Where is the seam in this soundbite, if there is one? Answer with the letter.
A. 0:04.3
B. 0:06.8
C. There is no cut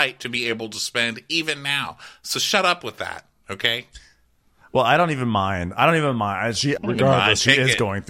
B